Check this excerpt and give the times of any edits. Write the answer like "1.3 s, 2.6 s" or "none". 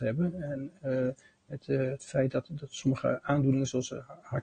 1.6 s